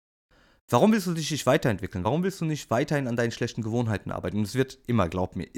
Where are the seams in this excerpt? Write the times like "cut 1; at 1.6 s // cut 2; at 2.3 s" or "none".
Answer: none